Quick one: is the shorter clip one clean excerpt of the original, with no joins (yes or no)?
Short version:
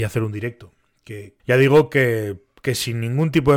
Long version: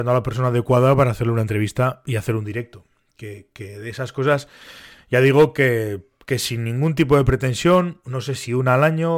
no